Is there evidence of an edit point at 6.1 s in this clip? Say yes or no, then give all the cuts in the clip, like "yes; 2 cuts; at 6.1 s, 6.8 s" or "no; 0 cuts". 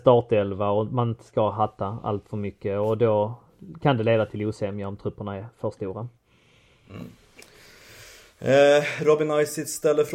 no; 0 cuts